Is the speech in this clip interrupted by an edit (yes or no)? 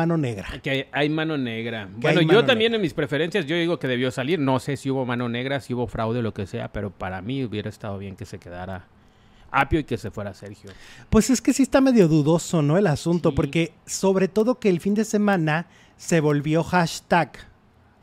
no